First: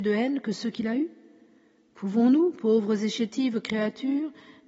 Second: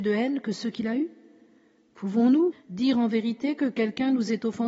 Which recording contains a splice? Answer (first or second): second